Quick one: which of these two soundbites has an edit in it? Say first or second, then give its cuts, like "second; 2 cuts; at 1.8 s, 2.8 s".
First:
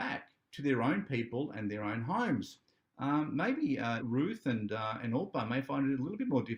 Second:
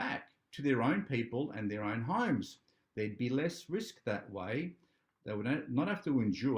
first; 2 cuts; at 2.8 s, 4.0 s